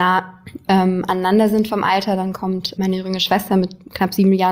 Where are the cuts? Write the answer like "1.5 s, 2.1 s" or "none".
2.8 s

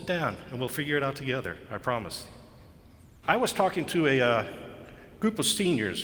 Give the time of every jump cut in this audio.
3.2 s

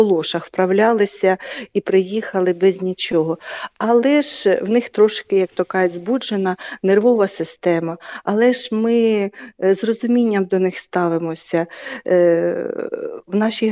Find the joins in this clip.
none

